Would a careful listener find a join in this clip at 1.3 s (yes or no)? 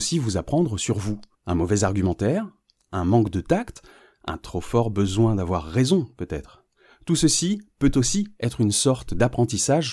yes